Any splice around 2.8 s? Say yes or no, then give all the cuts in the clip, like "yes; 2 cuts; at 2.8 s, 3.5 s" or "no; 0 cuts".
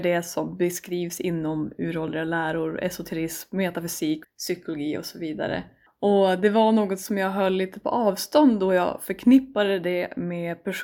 no; 2 cuts; at 4.2 s, 5.9 s